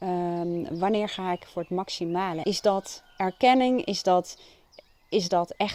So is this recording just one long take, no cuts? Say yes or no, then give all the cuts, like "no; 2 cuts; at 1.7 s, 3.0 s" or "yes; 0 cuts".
no; 1 cut; at 2.4 s